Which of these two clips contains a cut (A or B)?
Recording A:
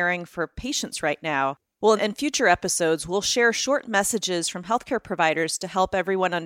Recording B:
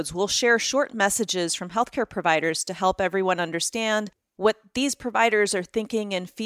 A